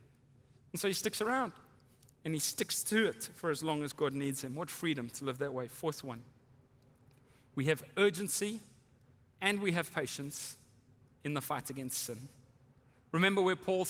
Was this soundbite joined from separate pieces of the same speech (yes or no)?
no